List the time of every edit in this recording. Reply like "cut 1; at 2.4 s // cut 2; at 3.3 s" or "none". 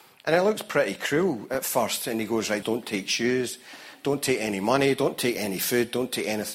cut 1; at 2.6 s

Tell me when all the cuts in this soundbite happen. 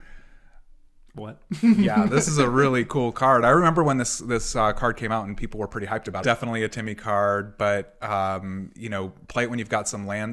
cut 1; at 6.2 s

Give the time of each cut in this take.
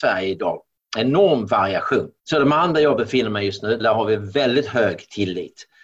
cut 1; at 2.2 s // cut 2; at 3.8 s

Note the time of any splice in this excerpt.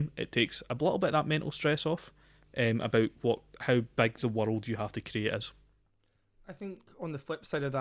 none

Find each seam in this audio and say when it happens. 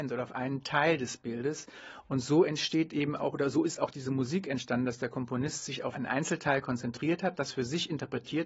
cut 1; at 5.9 s

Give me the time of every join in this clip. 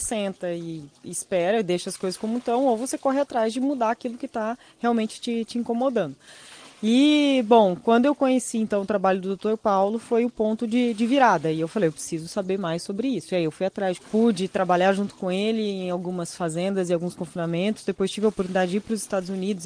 cut 1; at 14.0 s

